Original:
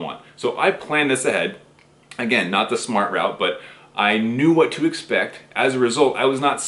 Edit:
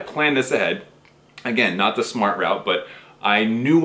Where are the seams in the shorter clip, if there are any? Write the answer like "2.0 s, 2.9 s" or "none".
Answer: none